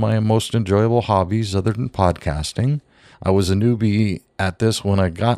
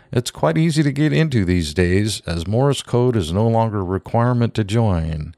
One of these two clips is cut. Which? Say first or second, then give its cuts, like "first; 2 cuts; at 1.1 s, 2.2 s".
first; 1 cut; at 3.1 s